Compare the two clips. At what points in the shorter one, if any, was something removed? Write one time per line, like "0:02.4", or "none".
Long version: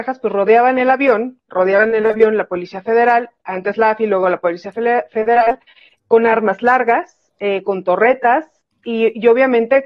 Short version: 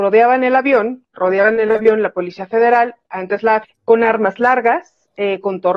0:03.6